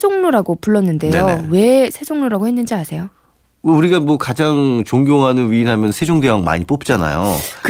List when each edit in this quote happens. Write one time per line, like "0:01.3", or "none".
none